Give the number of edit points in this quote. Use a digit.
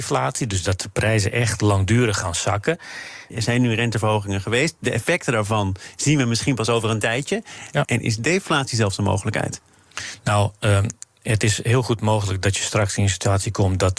2